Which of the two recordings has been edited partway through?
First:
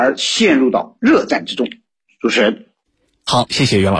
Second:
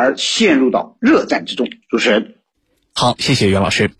second; 1 cut; at 1.8 s

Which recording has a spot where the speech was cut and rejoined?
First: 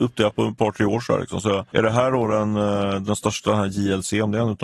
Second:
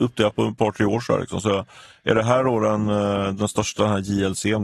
first; 1 cut; at 1.7 s

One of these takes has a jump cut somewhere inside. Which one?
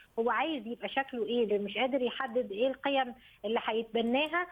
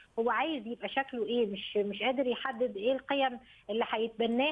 first; 1 cut; at 1.5 s

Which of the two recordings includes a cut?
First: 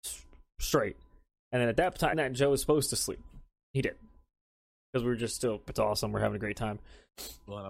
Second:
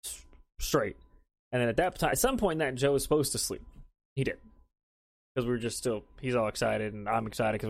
first; 2 cuts; at 2.1 s, 5.7 s

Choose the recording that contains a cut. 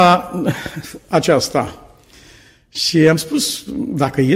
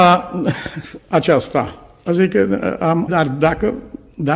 second; 2 cuts; at 2.1 s, 3.1 s

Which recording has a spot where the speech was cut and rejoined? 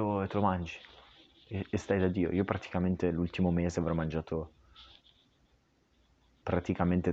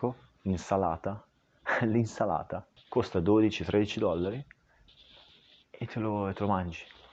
second; 1 cut; at 2.8 s

